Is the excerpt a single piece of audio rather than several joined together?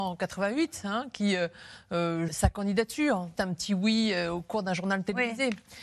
no; 2 cuts; at 2.3 s, 3.4 s

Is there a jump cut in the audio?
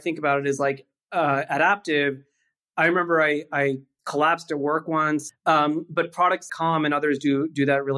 yes; 2 cuts; at 5.3 s, 6.5 s

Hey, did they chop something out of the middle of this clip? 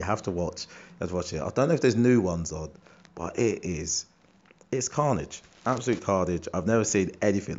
no; 0 cuts

